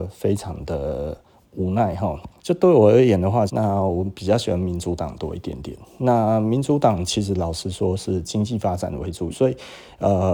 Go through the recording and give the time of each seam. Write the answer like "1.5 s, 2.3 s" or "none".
2.4 s, 3.5 s, 9.3 s